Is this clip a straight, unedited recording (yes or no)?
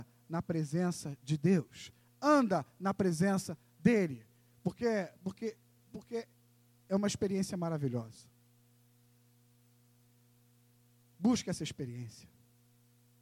yes